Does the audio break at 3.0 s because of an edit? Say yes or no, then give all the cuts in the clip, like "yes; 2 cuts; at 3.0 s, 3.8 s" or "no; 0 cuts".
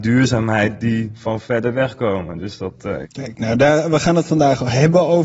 yes; 1 cut; at 3.0 s